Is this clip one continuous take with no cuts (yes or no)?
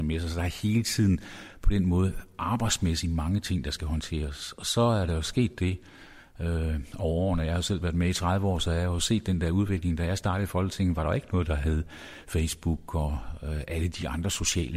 yes